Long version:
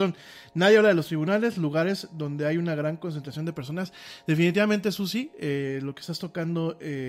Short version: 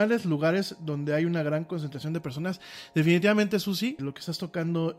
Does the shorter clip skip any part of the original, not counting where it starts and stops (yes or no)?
yes